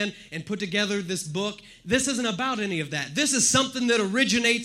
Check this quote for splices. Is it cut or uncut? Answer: uncut